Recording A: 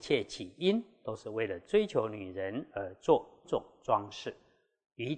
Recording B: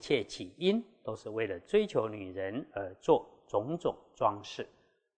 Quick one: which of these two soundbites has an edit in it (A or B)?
A